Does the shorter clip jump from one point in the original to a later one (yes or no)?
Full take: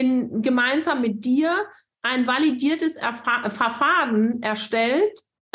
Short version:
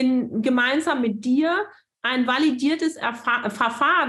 no